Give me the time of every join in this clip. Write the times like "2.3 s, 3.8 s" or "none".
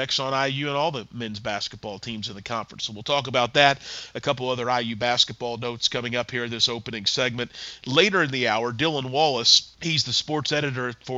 9.7 s

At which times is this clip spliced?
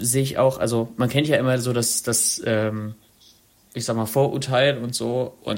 none

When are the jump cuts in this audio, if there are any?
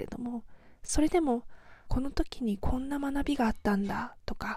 1.9 s

